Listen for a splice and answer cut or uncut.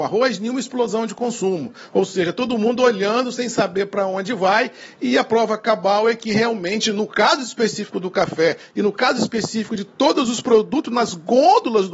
uncut